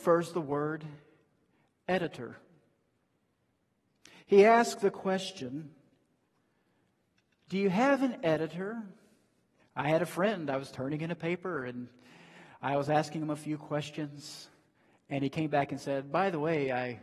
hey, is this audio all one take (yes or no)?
no